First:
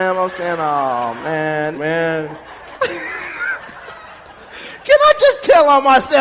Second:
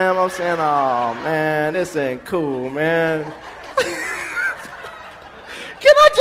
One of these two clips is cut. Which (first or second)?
first